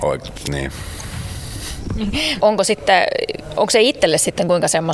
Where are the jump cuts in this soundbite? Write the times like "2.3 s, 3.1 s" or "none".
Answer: 2.4 s